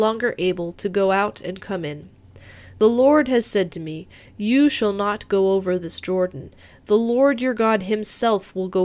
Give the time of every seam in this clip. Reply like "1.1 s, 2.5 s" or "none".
none